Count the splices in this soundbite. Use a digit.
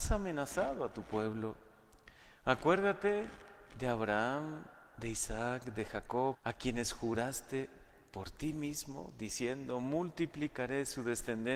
1